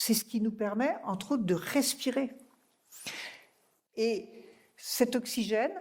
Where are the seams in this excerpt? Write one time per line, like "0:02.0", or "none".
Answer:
0:03.9